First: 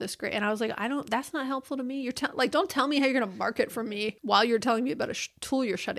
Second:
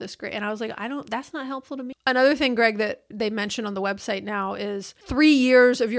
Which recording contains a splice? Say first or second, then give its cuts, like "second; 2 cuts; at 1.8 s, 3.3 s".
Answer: second; 1 cut; at 1.9 s